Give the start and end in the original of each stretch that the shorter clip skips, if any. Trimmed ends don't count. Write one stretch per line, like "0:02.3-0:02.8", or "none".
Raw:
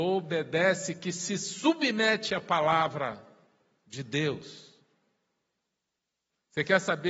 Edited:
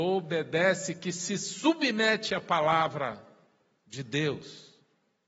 none